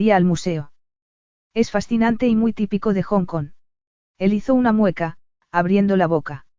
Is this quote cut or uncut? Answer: cut